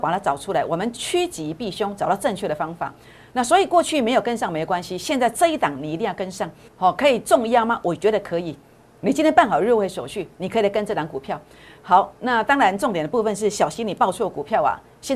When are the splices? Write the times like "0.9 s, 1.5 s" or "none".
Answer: 6.7 s